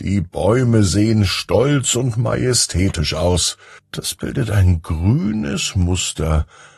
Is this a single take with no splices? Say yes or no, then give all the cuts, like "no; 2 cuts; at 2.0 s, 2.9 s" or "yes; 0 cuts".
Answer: no; 1 cut; at 3.8 s